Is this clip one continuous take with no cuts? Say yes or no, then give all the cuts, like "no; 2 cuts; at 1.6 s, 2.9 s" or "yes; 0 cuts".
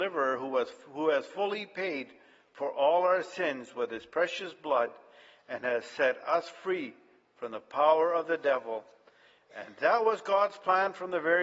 yes; 0 cuts